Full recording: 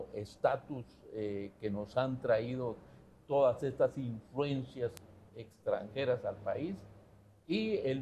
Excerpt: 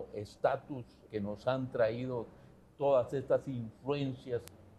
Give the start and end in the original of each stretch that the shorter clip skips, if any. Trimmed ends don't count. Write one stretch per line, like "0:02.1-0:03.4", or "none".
0:01.1-0:01.6

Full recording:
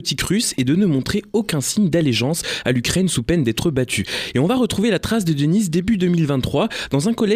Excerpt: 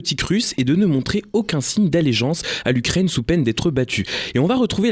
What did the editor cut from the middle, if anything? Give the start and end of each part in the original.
none

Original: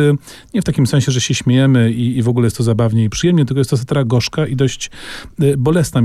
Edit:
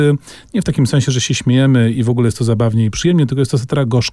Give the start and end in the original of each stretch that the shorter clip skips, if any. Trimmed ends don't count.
0:01.9-0:02.1

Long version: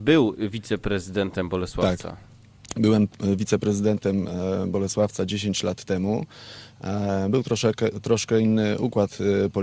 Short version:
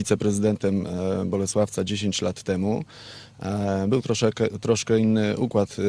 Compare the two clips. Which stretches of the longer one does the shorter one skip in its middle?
none

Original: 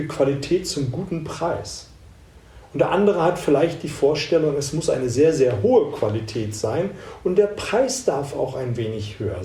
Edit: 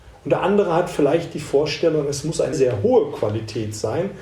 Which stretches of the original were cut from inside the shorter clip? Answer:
0:05.0-0:05.3

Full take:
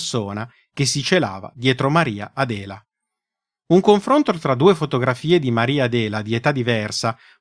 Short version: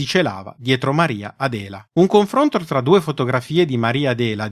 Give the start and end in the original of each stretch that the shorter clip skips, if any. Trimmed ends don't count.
0:02.8-0:03.6

